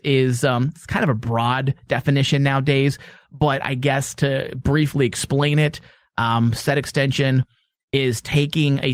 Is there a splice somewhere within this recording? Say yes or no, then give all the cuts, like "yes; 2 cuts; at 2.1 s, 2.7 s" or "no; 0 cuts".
no; 0 cuts